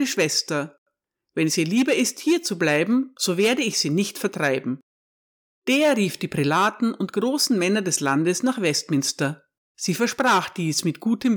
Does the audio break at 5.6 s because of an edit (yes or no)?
yes